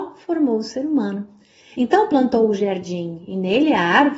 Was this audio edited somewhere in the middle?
yes; 1 cut; at 1.7 s

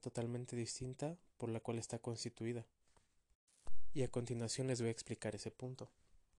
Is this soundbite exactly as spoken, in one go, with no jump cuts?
yes; 0 cuts

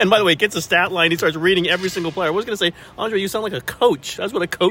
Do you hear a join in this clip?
no; 0 cuts

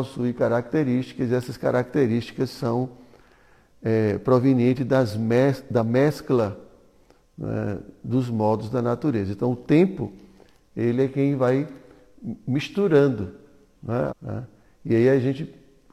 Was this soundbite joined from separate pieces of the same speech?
yes; 1 cut; at 14.1 s

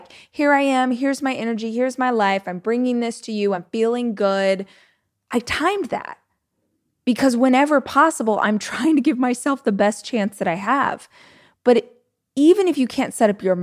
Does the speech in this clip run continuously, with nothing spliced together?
yes; 0 cuts

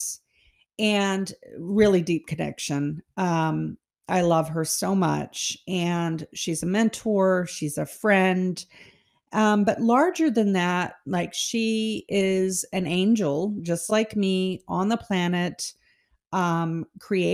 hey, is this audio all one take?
yes; 0 cuts

